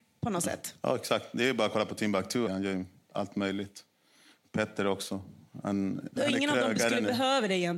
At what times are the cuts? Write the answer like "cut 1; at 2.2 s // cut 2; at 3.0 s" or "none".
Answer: cut 1; at 2.5 s // cut 2; at 6.2 s